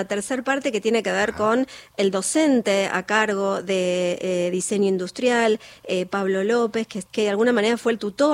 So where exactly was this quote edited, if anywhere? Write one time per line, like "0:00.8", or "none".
0:07.1